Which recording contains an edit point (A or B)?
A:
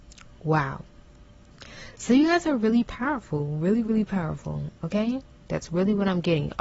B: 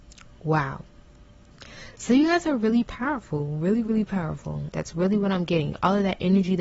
B